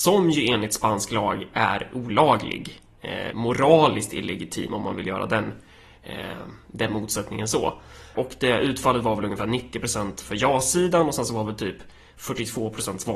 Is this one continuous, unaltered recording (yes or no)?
no